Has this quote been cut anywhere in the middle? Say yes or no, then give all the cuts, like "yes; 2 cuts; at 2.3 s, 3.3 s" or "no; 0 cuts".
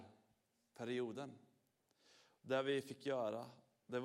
no; 0 cuts